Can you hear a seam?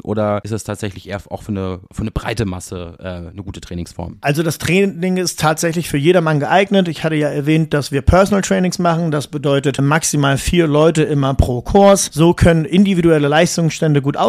yes; 1 cut; at 9.8 s

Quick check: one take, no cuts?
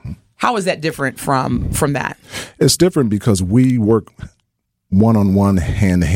yes; 0 cuts

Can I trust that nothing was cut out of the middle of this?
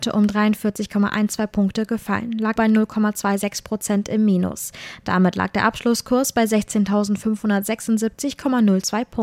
no; 1 cut; at 2.6 s

